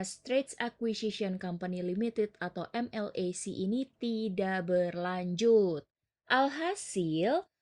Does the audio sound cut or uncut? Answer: uncut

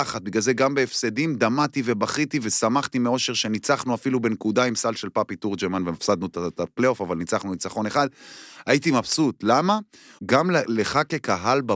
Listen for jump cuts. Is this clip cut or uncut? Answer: cut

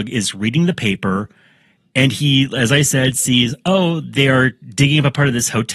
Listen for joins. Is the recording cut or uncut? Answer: uncut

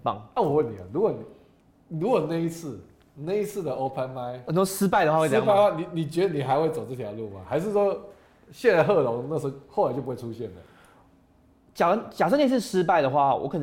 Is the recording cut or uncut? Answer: uncut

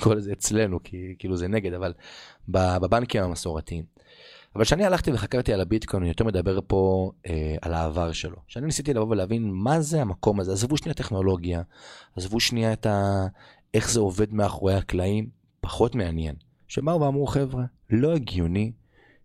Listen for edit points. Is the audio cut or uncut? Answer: cut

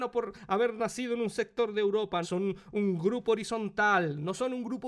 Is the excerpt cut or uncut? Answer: cut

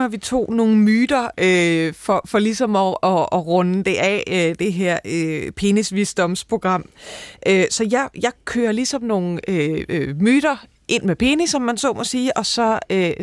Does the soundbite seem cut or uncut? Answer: uncut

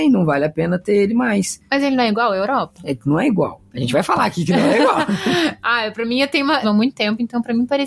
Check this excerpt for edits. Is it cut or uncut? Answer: cut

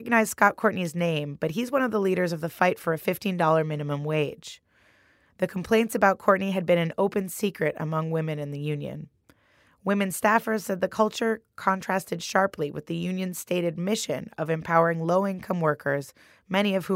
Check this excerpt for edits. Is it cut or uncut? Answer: uncut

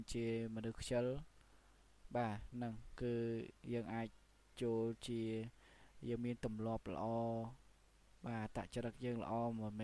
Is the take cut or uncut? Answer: uncut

